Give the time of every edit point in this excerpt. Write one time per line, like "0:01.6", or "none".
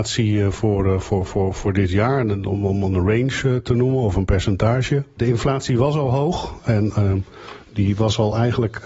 0:05.2